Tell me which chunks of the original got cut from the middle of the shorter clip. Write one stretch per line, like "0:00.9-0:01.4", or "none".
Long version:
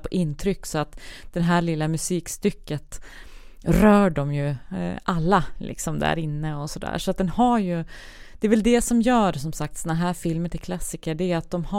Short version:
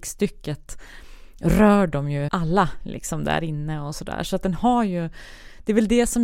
0:04.5-0:05.0